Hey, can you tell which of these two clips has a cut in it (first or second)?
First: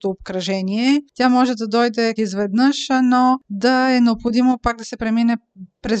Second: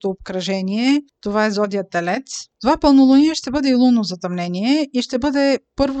first